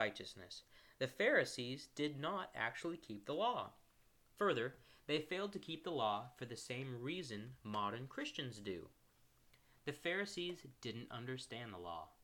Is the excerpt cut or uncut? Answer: uncut